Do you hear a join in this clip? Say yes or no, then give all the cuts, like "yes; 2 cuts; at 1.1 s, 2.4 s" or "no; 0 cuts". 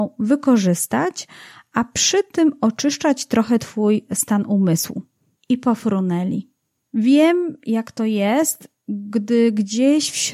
yes; 2 cuts; at 5.4 s, 6.9 s